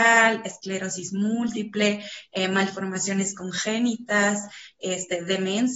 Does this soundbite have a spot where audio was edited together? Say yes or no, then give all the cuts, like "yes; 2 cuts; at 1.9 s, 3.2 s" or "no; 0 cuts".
no; 0 cuts